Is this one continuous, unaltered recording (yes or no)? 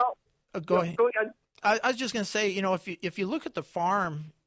yes